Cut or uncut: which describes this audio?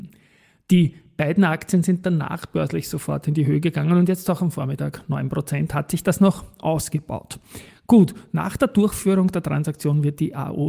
uncut